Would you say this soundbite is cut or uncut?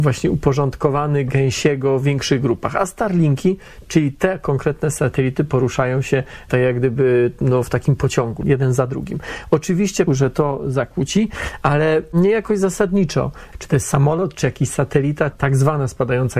cut